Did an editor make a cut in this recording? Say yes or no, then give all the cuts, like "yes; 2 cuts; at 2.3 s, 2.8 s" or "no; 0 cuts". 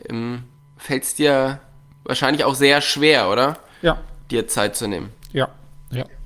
no; 0 cuts